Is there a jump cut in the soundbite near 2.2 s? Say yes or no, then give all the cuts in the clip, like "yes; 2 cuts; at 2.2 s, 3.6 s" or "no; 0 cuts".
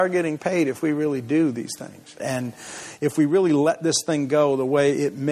yes; 1 cut; at 2.2 s